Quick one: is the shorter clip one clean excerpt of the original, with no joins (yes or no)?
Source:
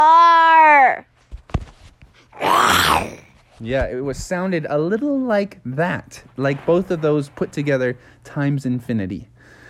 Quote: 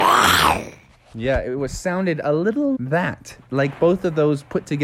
no